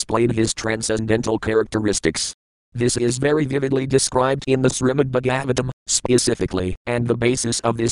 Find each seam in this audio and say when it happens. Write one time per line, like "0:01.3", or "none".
0:06.8